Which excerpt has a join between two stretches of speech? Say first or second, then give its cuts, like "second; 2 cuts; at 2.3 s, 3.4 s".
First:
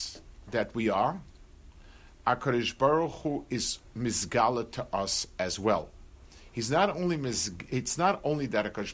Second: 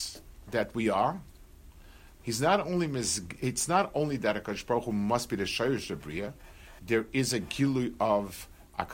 second; 2 cuts; at 2.2 s, 6.8 s